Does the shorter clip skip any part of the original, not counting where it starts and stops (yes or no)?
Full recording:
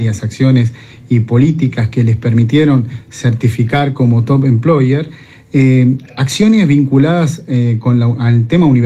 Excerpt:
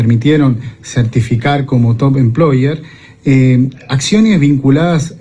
no